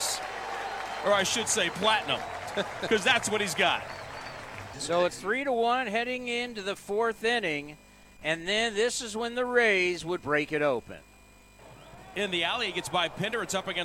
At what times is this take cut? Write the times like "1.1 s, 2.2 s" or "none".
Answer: 4.7 s, 10.2 s, 12.1 s

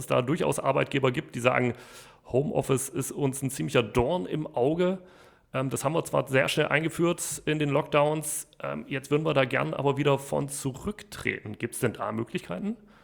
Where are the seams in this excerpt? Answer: none

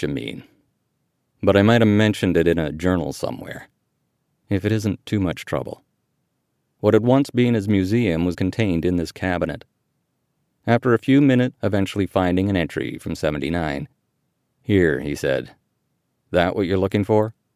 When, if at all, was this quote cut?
6.6 s, 8.3 s, 11.5 s

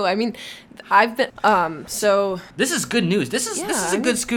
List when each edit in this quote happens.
1.3 s, 2.5 s

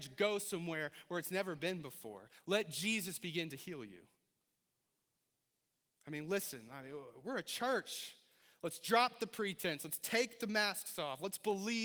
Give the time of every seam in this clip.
none

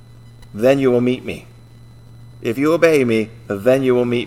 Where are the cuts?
2.3 s

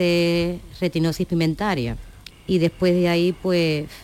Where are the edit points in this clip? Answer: 2.3 s

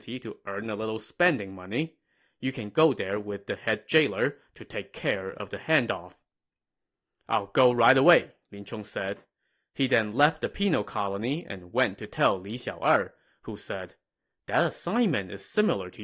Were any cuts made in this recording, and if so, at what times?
none

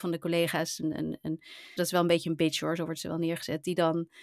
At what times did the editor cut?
1.8 s

